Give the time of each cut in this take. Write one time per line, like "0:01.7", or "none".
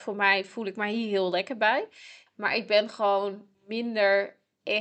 0:02.3
0:03.5